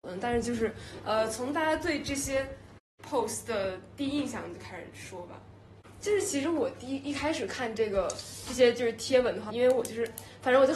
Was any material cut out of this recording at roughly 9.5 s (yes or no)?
yes